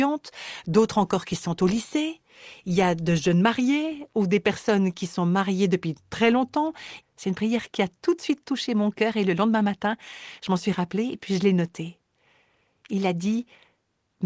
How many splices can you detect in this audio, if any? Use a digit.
1